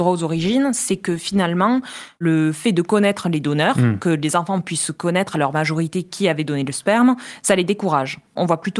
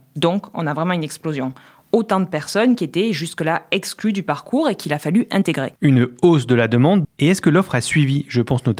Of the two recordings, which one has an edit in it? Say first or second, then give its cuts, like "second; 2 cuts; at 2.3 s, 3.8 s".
second; 2 cuts; at 5.8 s, 7.0 s